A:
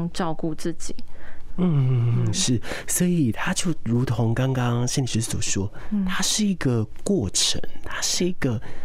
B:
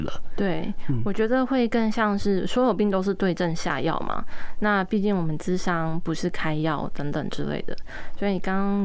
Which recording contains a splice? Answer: A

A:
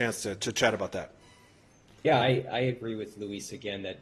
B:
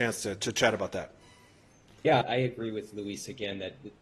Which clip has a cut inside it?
B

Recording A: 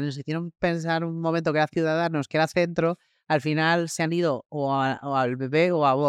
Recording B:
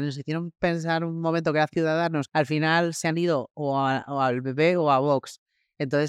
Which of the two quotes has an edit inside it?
B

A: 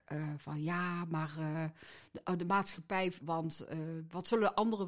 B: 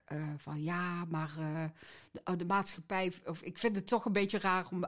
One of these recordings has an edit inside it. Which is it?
A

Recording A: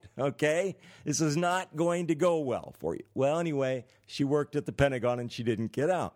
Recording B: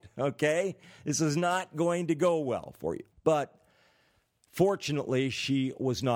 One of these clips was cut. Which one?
B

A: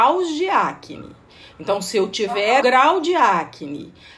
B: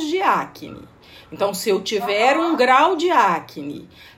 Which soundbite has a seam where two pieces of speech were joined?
A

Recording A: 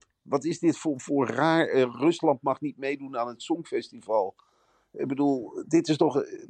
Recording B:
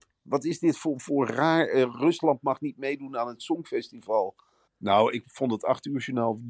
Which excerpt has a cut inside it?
B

